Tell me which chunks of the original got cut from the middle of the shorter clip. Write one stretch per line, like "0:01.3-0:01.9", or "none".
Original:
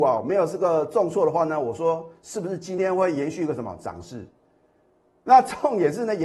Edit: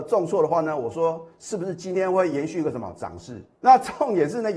0:04.4-0:05.2